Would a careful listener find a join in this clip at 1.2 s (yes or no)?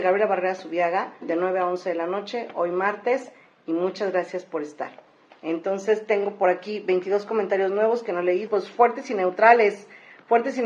yes